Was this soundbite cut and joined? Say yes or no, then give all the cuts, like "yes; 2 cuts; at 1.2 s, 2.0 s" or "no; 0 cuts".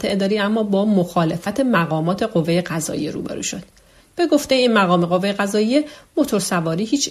yes; 1 cut; at 4.0 s